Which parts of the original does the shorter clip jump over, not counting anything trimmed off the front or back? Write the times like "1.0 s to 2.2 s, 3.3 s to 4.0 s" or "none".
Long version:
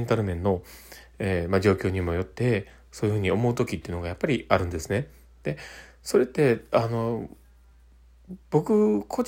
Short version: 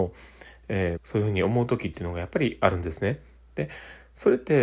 1.5 s to 2.8 s